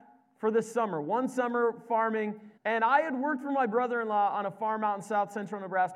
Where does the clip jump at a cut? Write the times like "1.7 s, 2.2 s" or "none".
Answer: 2.6 s